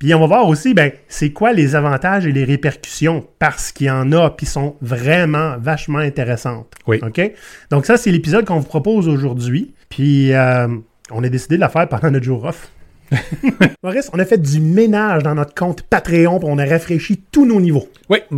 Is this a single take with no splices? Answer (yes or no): no